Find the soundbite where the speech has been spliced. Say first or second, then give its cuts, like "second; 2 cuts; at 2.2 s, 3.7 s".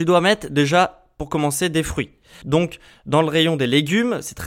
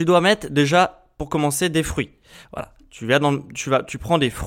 first; 1 cut; at 2.4 s